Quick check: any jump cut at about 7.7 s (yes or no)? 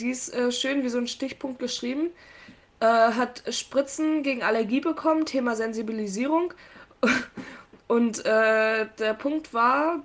no